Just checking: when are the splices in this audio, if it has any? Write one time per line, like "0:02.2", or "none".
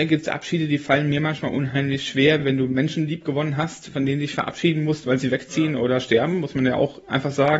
none